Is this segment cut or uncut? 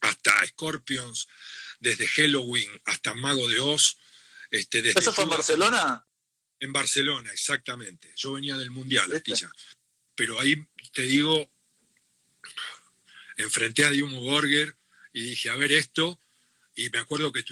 cut